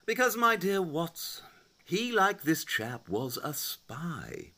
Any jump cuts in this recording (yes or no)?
no